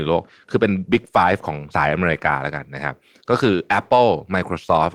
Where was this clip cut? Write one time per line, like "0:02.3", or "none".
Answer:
0:01.7